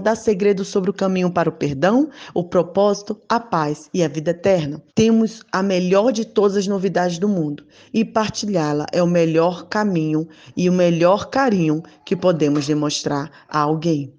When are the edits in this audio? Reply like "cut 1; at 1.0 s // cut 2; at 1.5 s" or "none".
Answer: cut 1; at 4.9 s